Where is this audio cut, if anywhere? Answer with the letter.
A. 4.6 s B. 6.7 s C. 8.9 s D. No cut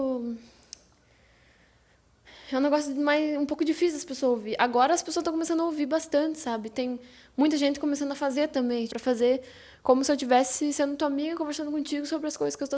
C